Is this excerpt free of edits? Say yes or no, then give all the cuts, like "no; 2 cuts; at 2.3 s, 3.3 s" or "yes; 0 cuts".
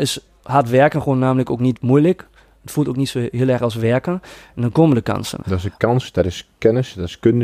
no; 1 cut; at 5.4 s